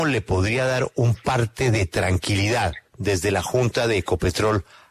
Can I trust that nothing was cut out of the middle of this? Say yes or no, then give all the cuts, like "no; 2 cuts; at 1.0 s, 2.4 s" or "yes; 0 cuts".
no; 1 cut; at 2.9 s